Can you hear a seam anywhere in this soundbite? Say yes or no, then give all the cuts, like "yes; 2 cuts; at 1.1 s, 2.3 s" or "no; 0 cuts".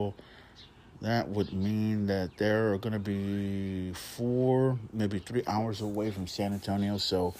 no; 0 cuts